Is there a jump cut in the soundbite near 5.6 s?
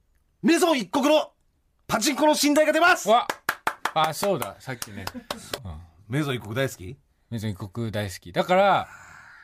yes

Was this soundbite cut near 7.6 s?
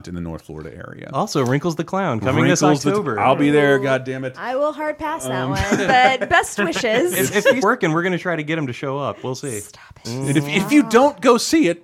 yes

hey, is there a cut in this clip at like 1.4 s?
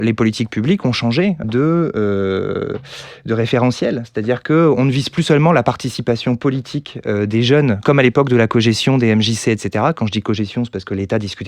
yes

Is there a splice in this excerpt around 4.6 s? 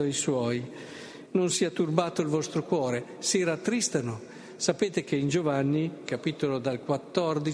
no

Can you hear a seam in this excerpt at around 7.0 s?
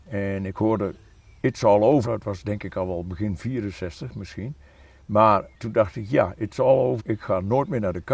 yes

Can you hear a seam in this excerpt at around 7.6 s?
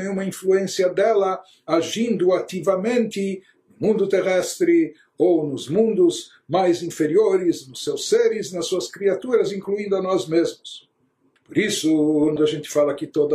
no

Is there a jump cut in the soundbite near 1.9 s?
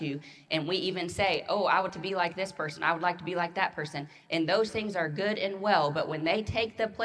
yes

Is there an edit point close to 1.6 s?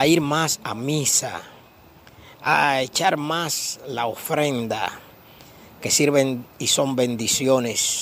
no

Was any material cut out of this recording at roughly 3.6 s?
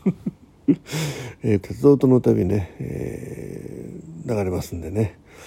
no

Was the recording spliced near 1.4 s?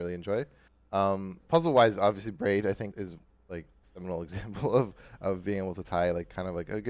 no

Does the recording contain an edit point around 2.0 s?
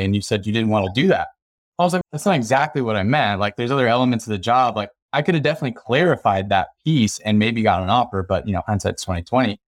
yes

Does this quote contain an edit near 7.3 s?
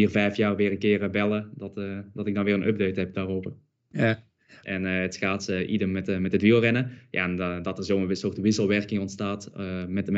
no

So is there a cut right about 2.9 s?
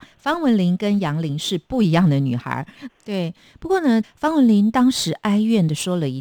yes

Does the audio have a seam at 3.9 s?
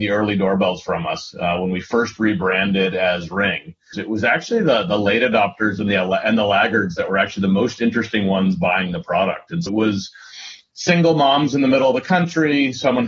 yes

